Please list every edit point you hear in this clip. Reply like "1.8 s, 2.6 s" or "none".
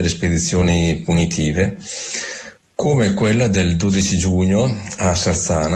none